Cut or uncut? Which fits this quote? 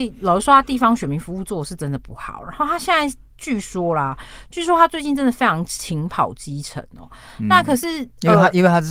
uncut